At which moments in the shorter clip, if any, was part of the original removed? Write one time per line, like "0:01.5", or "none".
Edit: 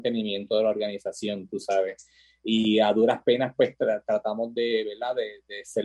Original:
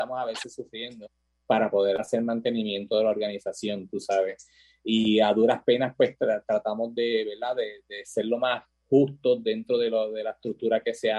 none

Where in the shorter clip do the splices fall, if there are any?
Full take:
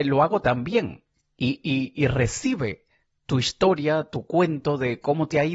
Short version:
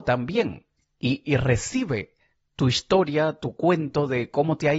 0:01.2

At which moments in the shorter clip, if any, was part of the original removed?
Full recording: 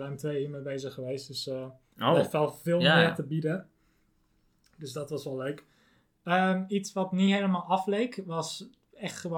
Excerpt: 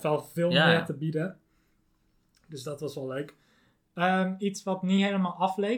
none

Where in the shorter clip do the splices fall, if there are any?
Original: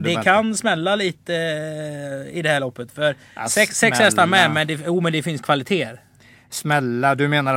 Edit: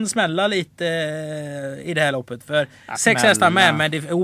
0:03.0

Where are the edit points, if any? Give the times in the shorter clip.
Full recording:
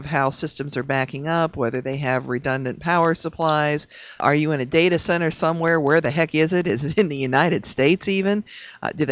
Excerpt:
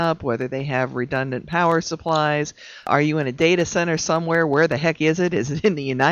none

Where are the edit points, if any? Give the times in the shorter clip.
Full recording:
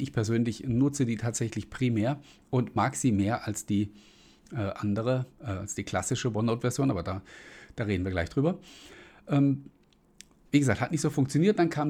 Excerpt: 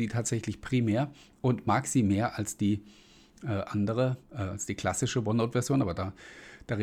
none

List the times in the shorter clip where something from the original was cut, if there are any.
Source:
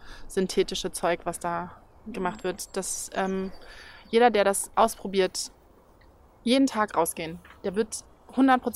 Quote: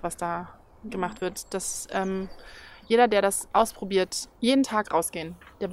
0:04.3

